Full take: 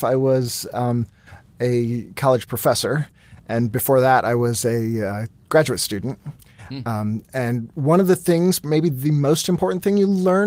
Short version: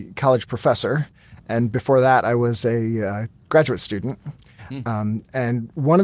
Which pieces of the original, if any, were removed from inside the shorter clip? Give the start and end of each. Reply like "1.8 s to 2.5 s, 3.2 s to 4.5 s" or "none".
none